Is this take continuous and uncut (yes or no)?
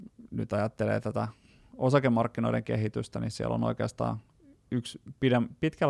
yes